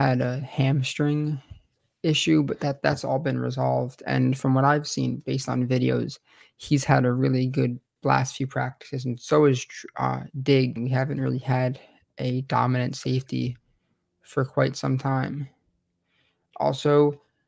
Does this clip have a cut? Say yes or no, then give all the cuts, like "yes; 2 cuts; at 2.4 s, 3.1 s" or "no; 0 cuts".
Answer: yes; 1 cut; at 10.8 s